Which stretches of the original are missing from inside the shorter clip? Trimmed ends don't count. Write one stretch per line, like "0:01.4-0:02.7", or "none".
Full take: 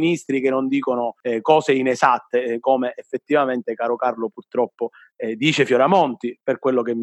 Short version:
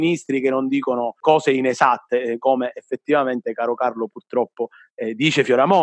0:01.2-0:01.4